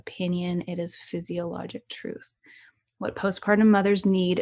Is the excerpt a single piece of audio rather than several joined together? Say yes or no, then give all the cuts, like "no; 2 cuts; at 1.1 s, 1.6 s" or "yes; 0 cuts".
yes; 0 cuts